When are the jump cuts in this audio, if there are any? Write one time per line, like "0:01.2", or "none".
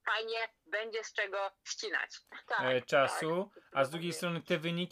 0:02.4